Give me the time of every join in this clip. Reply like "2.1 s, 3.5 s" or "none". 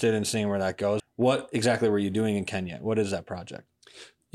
1.0 s